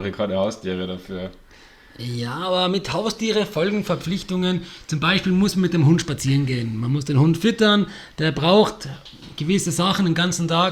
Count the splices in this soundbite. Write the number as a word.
zero